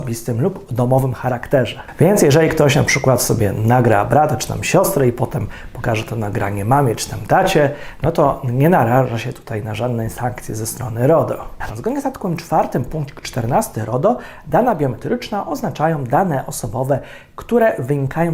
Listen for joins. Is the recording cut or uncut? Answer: cut